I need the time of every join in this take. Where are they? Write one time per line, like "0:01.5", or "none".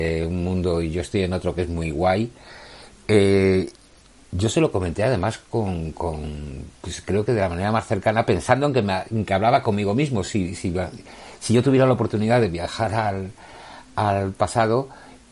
none